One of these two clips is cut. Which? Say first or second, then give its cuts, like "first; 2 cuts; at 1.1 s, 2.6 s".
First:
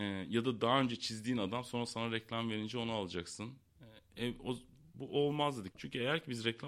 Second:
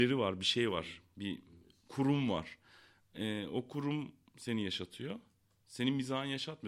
first; 1 cut; at 5.7 s